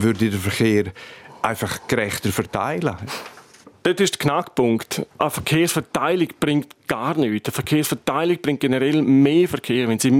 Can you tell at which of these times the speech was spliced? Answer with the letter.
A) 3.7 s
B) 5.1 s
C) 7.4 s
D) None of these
B